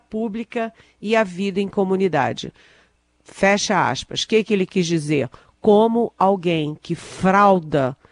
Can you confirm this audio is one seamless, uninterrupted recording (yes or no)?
yes